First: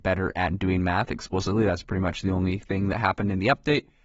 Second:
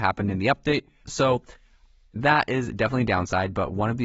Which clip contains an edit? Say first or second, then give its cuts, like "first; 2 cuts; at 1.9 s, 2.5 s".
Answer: second; 1 cut; at 1.0 s